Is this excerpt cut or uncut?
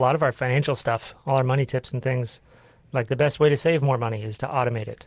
uncut